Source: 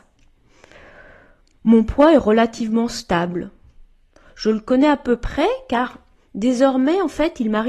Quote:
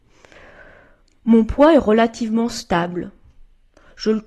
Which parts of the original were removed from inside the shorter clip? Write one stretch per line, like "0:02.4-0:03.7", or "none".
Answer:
none